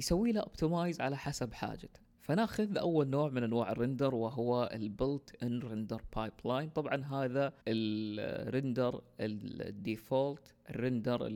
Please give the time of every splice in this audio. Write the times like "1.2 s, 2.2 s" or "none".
2.1 s, 7.6 s